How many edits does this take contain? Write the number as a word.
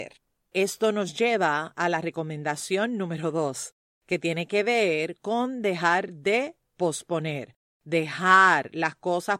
zero